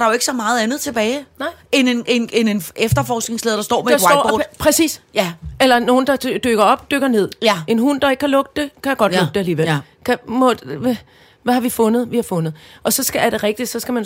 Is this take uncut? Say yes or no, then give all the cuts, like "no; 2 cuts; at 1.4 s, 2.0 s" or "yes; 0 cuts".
yes; 0 cuts